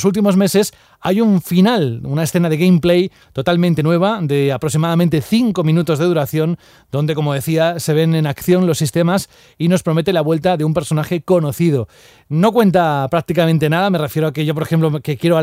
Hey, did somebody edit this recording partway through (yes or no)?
no